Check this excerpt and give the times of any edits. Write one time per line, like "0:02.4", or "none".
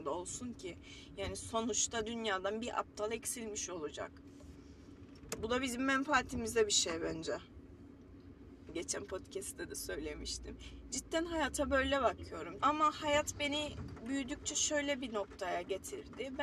0:08.7
0:12.6